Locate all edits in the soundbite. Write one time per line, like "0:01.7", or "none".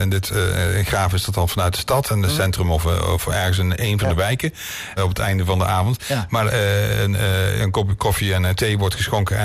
0:05.0